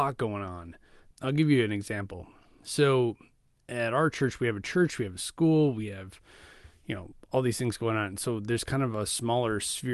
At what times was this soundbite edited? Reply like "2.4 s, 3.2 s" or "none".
1.1 s